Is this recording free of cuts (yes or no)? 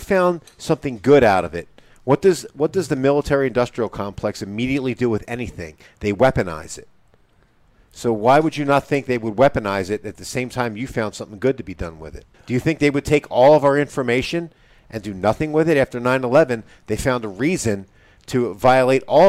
no